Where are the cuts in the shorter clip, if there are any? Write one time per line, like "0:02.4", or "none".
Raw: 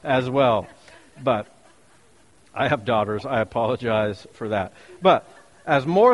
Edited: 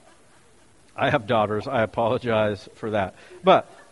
none